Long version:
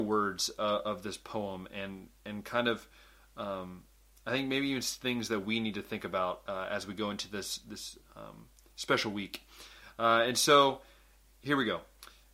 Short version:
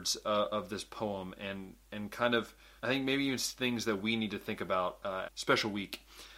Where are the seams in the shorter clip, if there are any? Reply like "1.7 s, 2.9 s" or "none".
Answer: 2.8 s, 5.2 s